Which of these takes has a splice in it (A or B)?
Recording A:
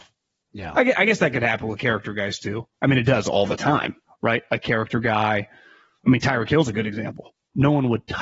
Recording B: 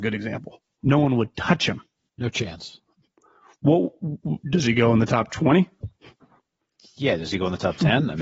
B